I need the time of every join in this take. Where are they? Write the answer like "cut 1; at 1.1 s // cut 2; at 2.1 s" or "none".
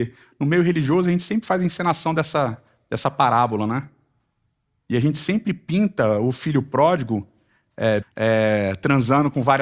cut 1; at 8.0 s

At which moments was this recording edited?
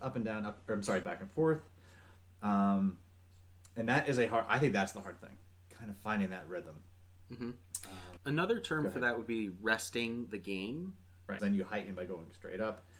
cut 1; at 1.0 s // cut 2; at 8.2 s // cut 3; at 11.4 s

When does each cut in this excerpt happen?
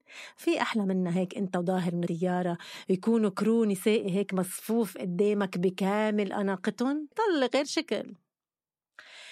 cut 1; at 7.1 s

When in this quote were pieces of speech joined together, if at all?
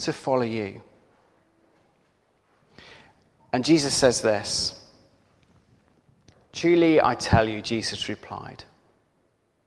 none

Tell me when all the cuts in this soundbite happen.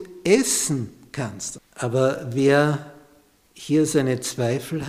cut 1; at 1.5 s

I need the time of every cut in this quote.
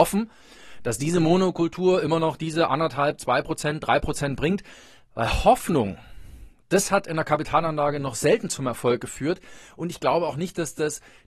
none

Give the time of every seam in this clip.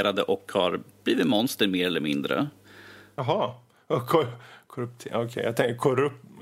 none

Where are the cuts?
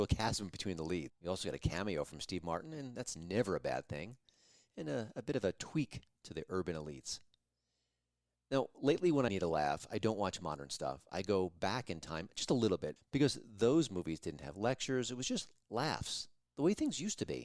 cut 1; at 1.1 s // cut 2; at 9.3 s // cut 3; at 13.0 s

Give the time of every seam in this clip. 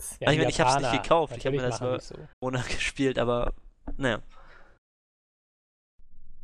cut 1; at 2.3 s

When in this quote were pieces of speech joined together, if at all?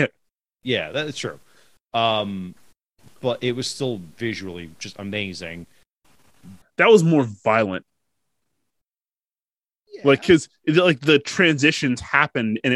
cut 1; at 6.6 s

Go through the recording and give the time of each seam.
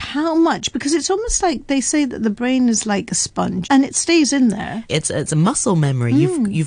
cut 1; at 3.6 s // cut 2; at 4.9 s

